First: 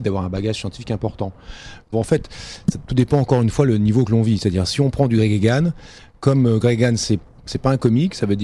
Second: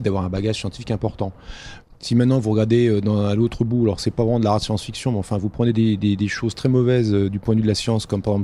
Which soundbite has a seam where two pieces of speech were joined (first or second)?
first